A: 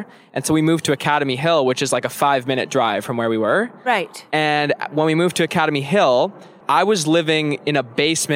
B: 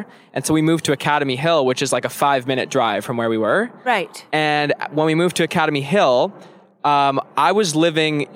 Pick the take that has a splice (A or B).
A